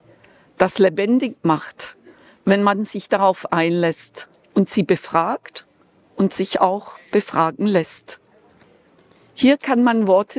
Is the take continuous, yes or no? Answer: yes